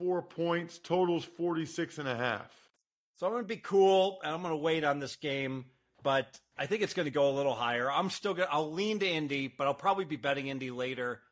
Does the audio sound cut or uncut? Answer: uncut